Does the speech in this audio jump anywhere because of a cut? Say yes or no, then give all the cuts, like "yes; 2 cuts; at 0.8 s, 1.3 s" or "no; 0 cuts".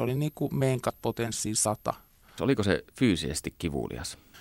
yes; 1 cut; at 2.4 s